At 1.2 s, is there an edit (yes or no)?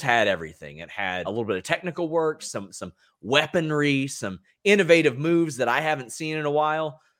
yes